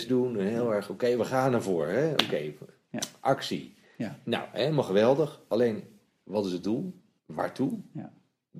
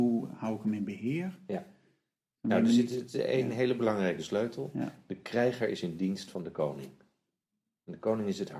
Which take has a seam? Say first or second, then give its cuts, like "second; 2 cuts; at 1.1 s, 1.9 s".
first; 1 cut; at 7.2 s